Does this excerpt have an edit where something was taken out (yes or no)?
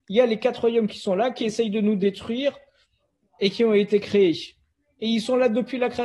no